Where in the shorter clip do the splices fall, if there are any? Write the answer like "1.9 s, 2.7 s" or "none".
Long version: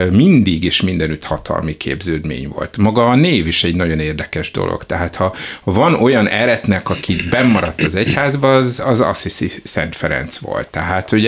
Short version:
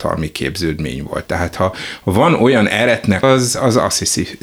1.3 s, 3.2 s

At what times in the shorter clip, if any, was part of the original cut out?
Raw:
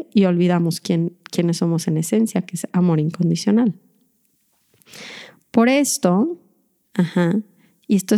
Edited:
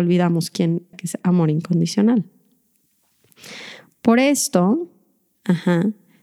0.9 s

